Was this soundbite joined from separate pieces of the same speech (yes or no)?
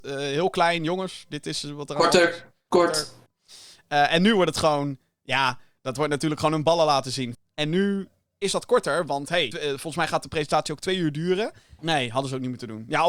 yes